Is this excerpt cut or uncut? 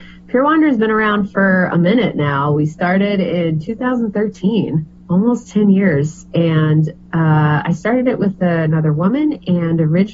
uncut